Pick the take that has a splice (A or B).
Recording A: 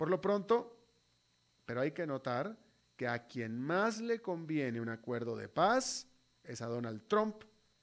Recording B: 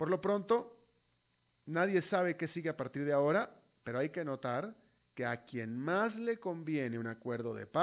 A